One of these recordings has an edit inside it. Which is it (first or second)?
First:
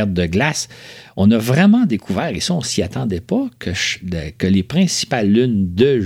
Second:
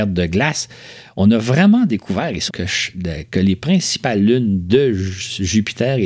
second